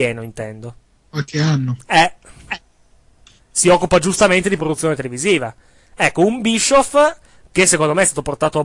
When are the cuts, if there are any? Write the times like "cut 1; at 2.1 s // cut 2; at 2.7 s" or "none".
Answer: none